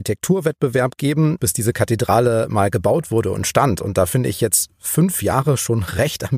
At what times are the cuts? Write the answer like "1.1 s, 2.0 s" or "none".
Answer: 1.4 s